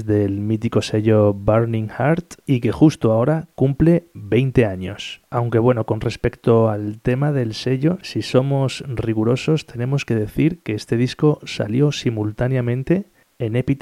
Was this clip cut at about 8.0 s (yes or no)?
no